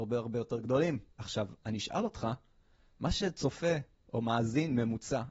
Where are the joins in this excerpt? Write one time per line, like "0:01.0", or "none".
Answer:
0:01.1